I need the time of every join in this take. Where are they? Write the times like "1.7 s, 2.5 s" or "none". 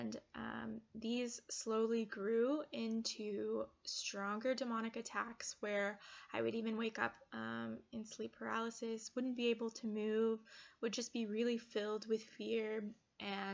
none